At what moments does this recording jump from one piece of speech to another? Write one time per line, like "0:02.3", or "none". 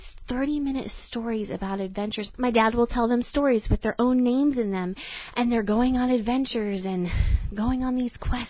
none